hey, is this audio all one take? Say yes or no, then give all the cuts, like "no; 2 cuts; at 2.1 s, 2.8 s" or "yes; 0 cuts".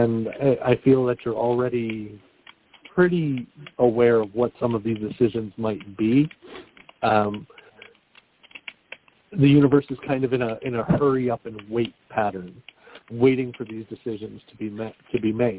no; 2 cuts; at 3.7 s, 13.0 s